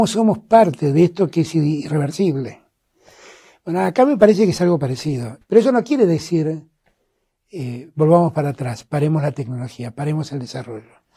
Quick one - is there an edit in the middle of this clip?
yes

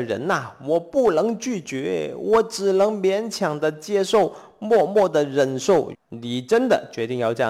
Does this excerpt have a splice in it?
yes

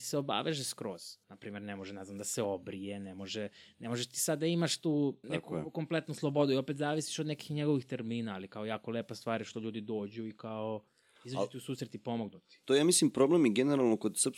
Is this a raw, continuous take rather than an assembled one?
no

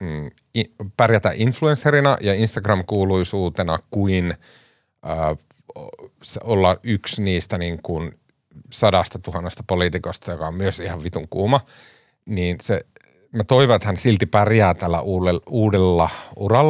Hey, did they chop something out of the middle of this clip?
no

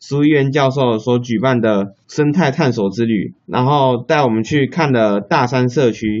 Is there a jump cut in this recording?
yes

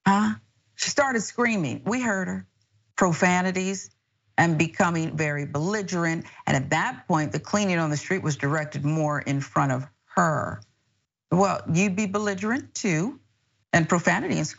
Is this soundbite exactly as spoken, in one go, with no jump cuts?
yes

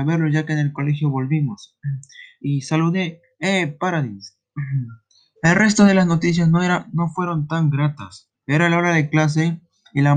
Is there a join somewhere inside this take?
yes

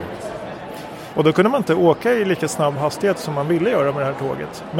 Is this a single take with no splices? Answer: no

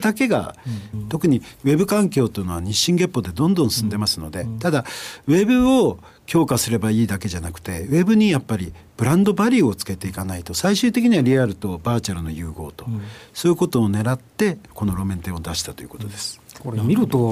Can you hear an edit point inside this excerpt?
yes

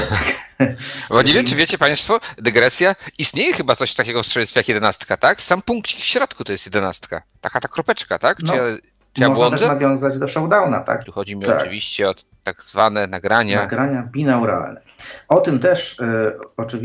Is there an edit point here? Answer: yes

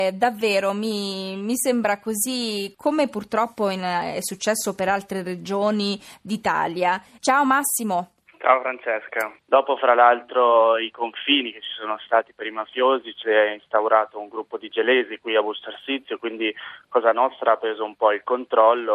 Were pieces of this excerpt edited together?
yes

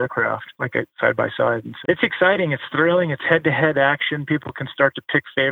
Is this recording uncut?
no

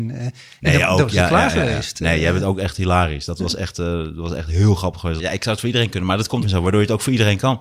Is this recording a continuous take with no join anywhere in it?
no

